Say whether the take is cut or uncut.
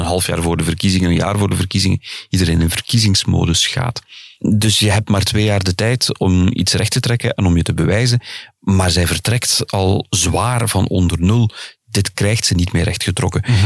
uncut